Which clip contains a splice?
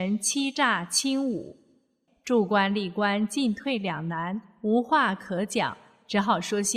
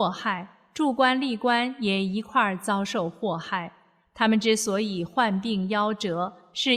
first; 1 cut; at 2.1 s

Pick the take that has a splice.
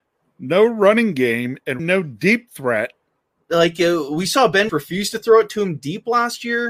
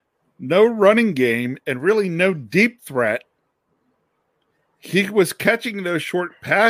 first; 3 cuts; at 1.8 s, 3.4 s, 4.7 s

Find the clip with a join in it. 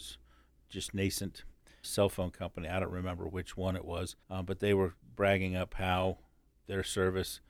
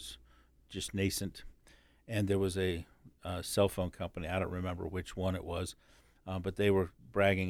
first; 2 cuts; at 1.8 s, 4.2 s

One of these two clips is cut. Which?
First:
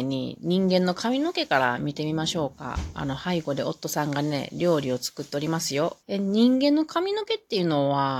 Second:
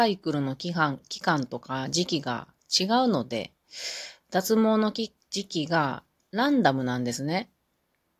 first; 1 cut; at 6.0 s

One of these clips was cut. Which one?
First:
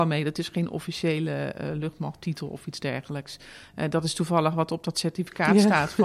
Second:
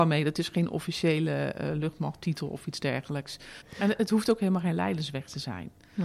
second; 1 cut; at 3.6 s

